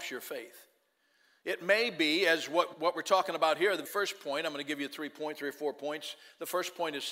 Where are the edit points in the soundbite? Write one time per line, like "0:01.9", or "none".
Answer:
0:02.7
0:03.8